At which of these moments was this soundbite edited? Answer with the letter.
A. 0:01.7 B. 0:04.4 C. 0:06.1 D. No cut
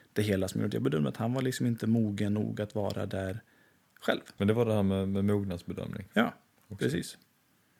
B